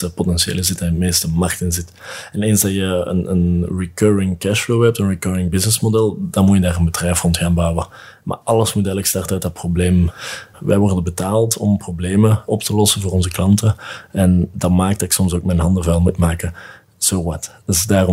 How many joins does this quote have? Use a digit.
0